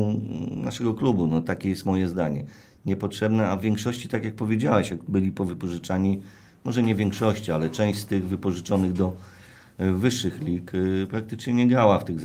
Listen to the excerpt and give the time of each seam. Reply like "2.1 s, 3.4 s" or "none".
none